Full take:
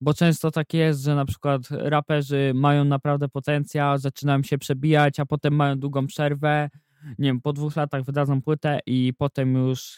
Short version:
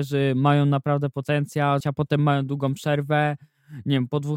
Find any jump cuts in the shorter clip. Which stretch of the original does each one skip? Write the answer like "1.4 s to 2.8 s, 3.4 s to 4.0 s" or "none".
4.0 s to 5.1 s